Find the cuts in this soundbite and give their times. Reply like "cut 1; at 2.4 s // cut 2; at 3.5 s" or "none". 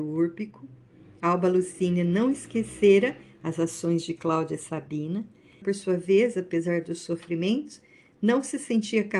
cut 1; at 5.6 s